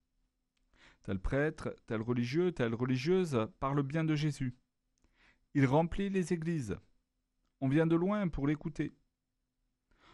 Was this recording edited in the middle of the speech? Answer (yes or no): no